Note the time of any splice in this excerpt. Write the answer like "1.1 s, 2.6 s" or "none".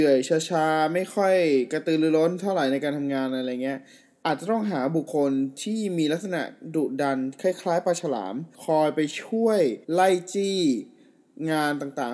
5.1 s, 8.5 s, 9.8 s

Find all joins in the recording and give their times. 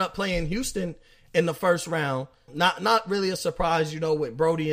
2.5 s

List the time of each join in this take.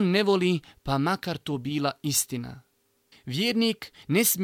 3.1 s

